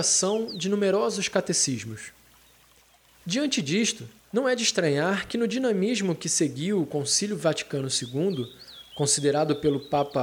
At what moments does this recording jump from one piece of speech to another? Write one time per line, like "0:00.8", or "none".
0:04.2